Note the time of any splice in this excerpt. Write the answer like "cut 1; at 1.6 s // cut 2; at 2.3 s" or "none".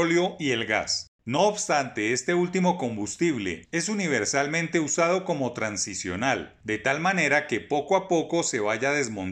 cut 1; at 3.6 s